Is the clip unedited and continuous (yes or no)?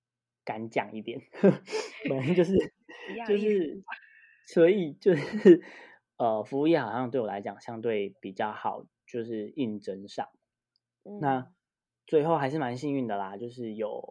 yes